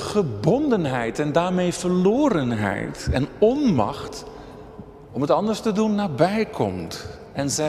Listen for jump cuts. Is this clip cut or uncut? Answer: uncut